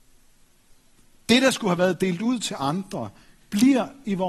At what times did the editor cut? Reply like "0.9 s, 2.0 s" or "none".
none